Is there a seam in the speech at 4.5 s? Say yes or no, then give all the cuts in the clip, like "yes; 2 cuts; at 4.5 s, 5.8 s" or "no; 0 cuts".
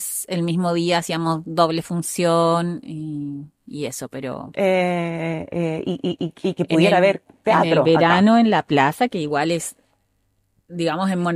yes; 1 cut; at 4.5 s